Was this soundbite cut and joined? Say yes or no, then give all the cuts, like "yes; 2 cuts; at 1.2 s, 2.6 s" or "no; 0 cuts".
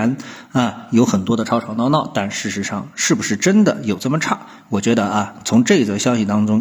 no; 0 cuts